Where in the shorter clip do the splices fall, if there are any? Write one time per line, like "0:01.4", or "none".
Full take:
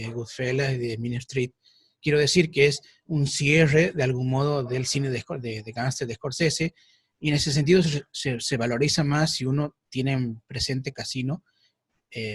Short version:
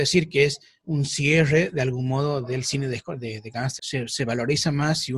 0:03.8